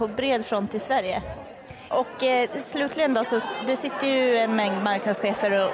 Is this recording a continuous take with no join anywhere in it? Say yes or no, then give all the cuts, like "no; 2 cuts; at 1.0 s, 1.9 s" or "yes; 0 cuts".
no; 1 cut; at 1.9 s